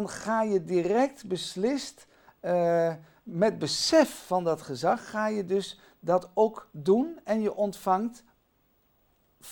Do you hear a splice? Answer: no; 0 cuts

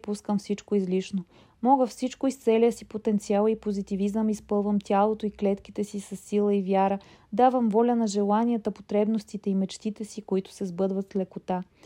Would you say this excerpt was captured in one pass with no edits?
yes; 0 cuts

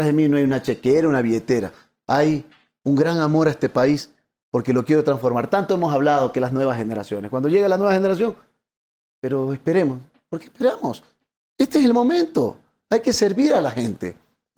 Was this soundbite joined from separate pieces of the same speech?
yes; 1 cut; at 12.8 s

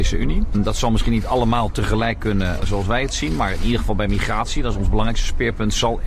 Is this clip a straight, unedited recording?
yes; 0 cuts

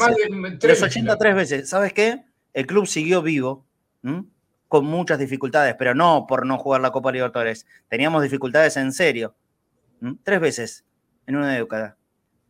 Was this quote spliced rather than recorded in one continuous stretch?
no; 0 cuts

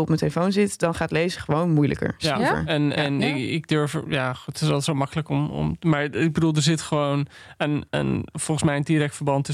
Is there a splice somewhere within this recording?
no; 0 cuts

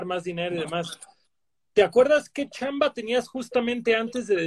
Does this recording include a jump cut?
no; 0 cuts

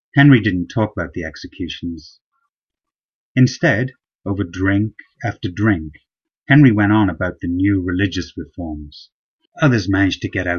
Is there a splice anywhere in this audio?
yes; 2 cuts; at 3.2 s, 9.5 s

